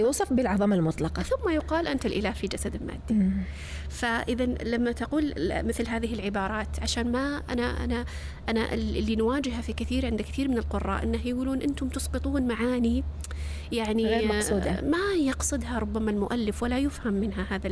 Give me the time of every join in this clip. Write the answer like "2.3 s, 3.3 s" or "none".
none